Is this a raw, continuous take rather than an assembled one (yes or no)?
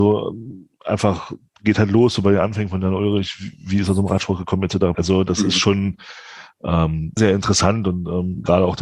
no